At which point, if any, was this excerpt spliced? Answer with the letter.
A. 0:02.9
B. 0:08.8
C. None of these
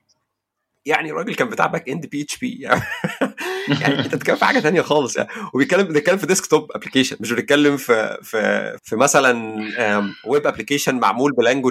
B